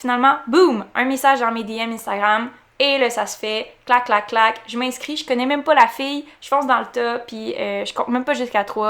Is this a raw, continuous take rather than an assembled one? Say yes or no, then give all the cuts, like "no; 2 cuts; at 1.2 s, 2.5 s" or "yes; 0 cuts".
no; 1 cut; at 6.4 s